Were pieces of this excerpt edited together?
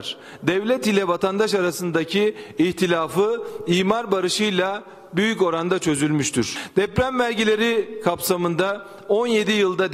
no; 0 cuts

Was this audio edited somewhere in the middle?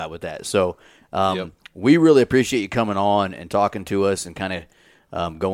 no; 0 cuts

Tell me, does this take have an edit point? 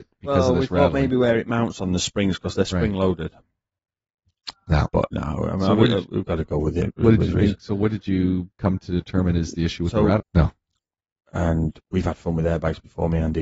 yes; 2 cuts; at 4.5 s, 10.2 s

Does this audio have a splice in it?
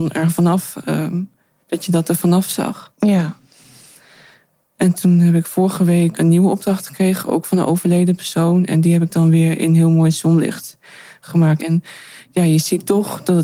yes; 2 cuts; at 6.1 s, 11.6 s

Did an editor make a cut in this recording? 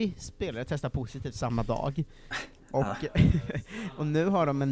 no; 0 cuts

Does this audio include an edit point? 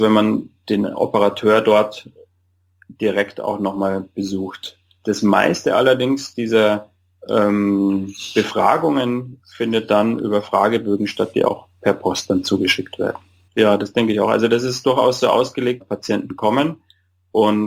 yes; 2 cuts; at 13.5 s, 15.8 s

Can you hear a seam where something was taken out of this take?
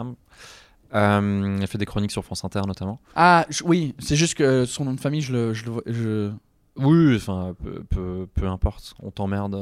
no; 0 cuts

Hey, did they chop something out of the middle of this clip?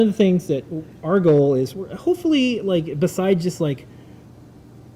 no; 0 cuts

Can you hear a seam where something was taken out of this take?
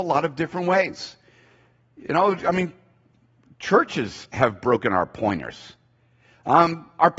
no; 0 cuts

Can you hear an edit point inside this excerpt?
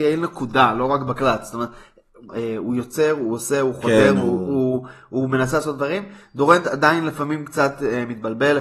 yes; 1 cut; at 2.3 s

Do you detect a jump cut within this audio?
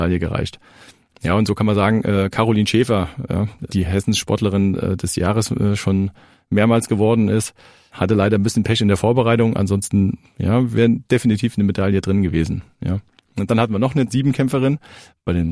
no; 0 cuts

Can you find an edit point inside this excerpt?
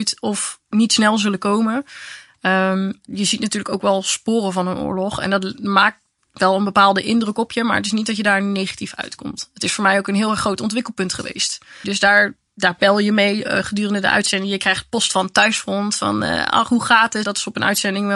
yes; 3 cuts; at 3.1 s, 11.8 s, 17.2 s

